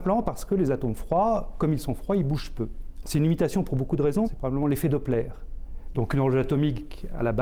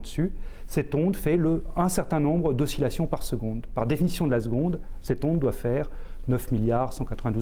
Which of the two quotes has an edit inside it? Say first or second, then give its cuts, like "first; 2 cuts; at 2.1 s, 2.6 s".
first; 3 cuts; at 3.0 s, 4.2 s, 5.9 s